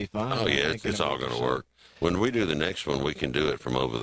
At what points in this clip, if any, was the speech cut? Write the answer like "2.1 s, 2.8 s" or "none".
none